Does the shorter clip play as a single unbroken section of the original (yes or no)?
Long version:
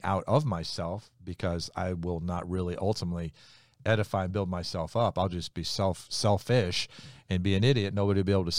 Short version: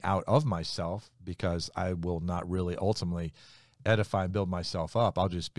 yes